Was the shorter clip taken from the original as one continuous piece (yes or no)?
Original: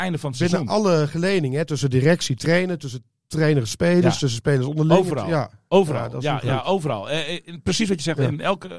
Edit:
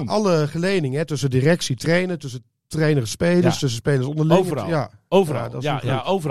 yes